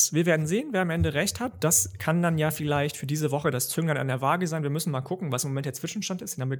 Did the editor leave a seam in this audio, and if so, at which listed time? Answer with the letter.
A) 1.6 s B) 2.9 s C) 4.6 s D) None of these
D